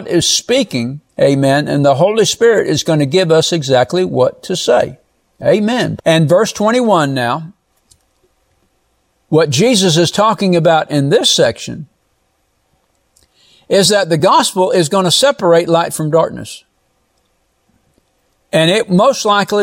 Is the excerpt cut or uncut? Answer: cut